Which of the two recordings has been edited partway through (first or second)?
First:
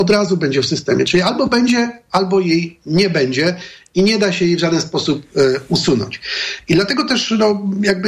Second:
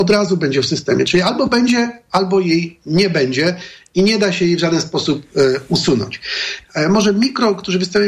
second